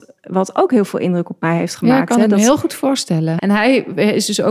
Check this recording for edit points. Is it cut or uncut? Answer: cut